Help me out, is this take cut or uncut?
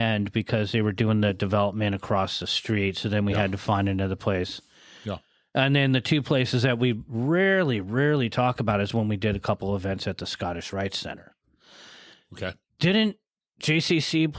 uncut